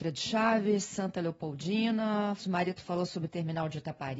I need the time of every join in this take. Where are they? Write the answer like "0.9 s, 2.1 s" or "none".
2.4 s